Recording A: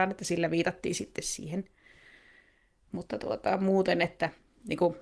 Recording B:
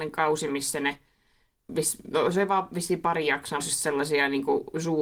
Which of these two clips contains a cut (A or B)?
B